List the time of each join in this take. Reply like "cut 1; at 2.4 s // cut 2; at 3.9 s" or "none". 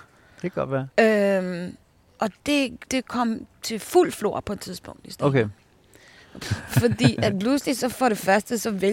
cut 1; at 2.9 s // cut 2; at 6.4 s